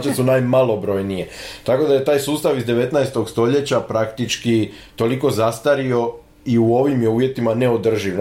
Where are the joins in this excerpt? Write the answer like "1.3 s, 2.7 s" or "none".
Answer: none